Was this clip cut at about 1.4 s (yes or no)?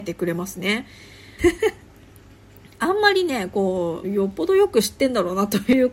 yes